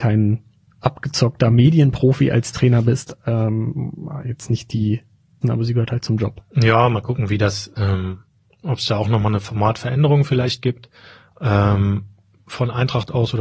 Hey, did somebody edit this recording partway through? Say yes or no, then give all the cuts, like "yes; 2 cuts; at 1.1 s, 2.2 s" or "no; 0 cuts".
yes; 1 cut; at 5.4 s